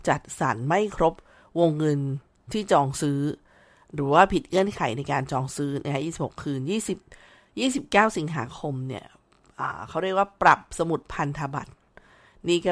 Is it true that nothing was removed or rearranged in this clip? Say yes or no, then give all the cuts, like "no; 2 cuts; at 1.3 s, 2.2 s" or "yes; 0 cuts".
yes; 0 cuts